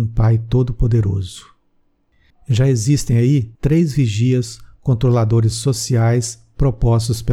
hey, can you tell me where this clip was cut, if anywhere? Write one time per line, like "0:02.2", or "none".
0:02.3
0:03.6